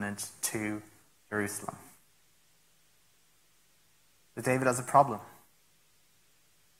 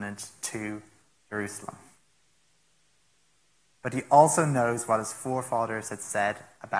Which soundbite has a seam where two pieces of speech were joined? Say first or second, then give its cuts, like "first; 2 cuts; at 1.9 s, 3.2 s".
second; 1 cut; at 3.7 s